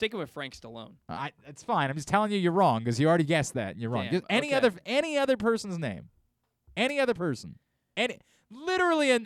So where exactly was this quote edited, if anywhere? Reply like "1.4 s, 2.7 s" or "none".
none